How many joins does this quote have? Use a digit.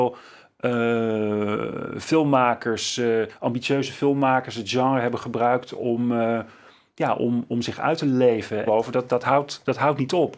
1